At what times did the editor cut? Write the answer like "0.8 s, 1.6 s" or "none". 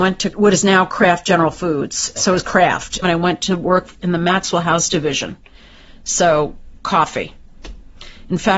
3.0 s